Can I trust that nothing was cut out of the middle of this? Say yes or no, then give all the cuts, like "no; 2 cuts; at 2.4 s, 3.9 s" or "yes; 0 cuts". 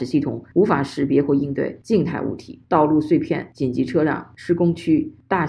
yes; 0 cuts